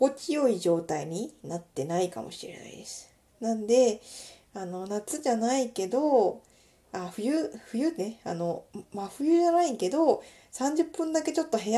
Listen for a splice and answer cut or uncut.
uncut